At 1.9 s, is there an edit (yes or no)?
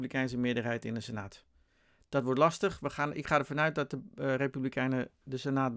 no